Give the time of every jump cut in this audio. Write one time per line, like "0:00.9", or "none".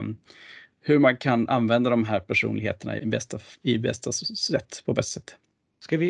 0:03.0